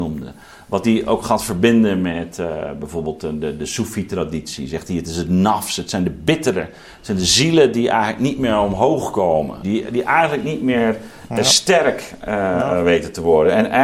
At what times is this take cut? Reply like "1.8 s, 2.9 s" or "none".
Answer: 9.6 s